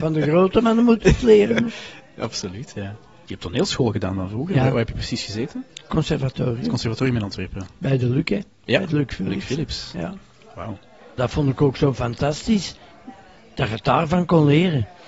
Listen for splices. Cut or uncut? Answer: uncut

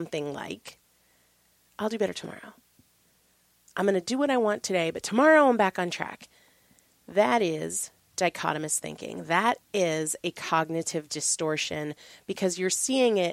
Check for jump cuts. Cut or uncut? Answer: uncut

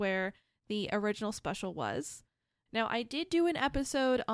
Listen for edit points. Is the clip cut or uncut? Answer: cut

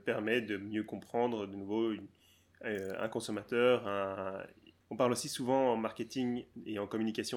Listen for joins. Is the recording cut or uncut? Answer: uncut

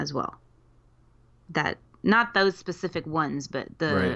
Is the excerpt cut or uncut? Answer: uncut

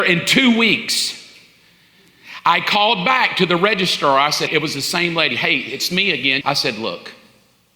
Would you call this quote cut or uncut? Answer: cut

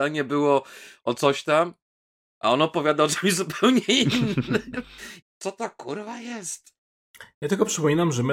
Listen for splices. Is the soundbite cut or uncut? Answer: cut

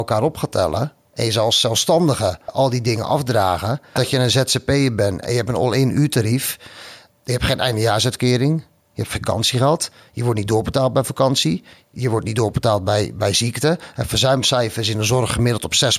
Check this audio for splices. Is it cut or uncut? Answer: cut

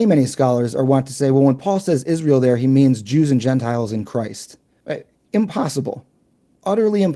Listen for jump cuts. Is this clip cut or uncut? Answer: uncut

